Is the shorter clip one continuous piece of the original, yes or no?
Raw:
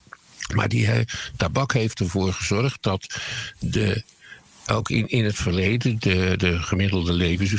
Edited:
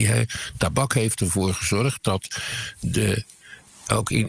yes